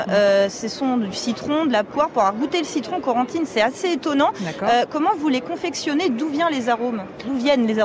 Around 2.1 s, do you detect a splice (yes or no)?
no